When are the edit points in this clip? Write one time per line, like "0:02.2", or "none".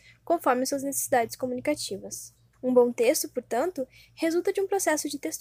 0:02.5